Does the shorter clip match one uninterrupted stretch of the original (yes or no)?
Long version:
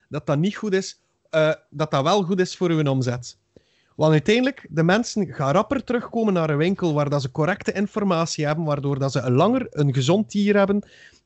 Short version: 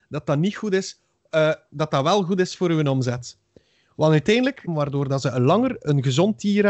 no